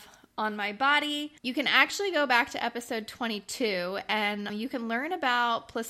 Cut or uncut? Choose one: cut